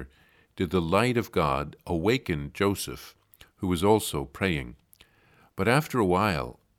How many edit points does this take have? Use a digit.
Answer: 0